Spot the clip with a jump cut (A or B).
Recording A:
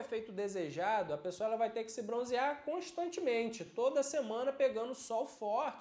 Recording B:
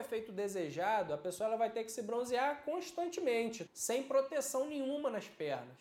B